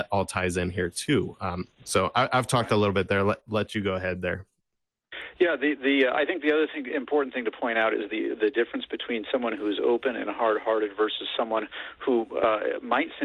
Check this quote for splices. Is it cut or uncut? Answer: uncut